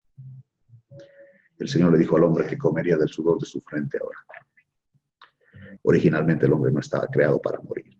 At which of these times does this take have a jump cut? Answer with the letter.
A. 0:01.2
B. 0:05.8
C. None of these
B